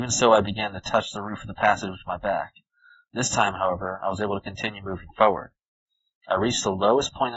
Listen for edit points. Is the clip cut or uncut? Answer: uncut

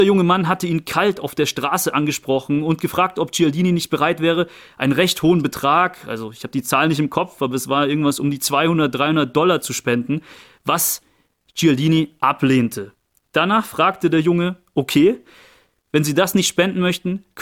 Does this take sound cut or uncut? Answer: uncut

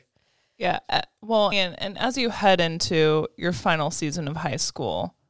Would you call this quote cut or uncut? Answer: cut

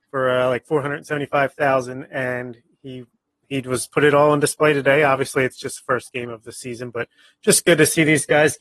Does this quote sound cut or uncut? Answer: uncut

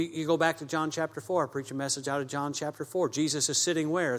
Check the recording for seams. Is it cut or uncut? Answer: uncut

